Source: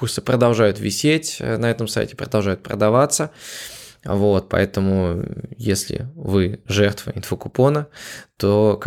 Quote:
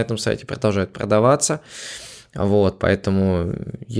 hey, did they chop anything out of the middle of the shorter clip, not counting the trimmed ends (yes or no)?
no